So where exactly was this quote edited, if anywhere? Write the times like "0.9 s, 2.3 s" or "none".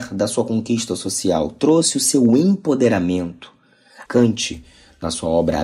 4.1 s